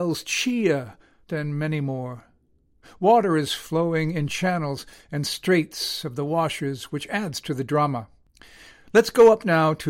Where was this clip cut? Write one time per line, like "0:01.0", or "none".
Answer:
0:01.3